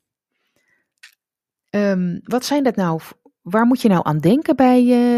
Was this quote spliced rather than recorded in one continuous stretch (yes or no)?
no